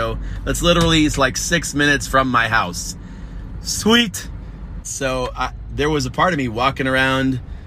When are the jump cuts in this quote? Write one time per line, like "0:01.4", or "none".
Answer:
0:04.8

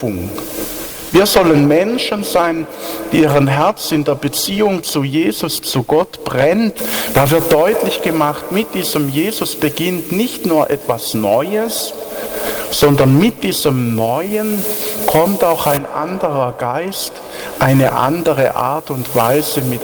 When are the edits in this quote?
0:07.1
0:17.6

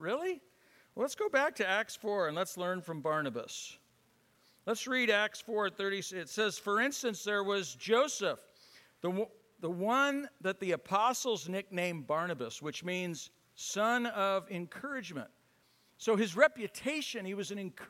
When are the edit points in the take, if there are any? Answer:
none

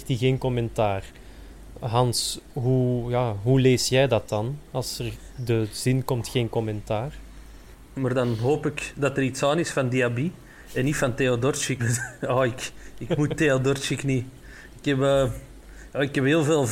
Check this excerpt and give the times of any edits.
0:07.9
0:11.8

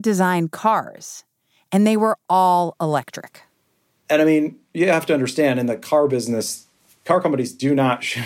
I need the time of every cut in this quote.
none

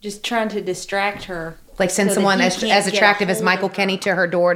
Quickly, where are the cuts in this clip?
0:01.7

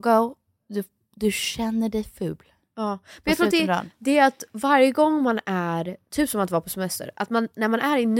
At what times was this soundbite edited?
none

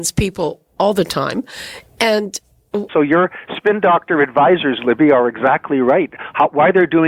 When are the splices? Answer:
0:02.9

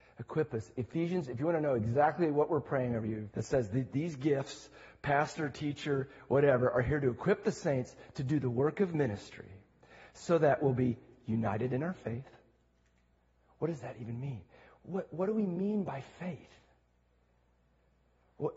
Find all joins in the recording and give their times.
0:03.3

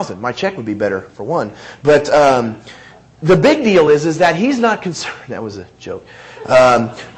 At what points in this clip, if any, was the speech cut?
none

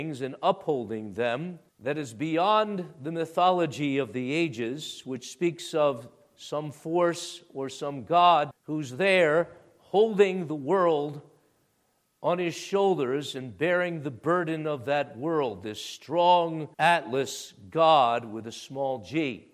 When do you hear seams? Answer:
0:01.7
0:08.5
0:16.7

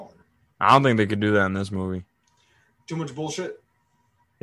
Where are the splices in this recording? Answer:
none

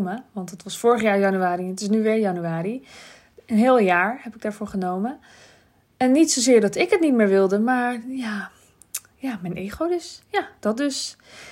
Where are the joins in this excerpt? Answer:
none

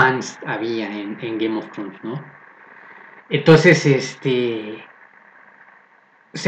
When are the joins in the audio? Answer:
0:01.2
0:03.2

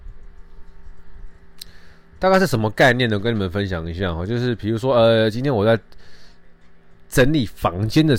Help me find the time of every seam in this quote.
none

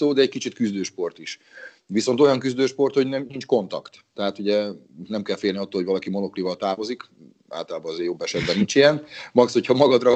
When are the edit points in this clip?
none

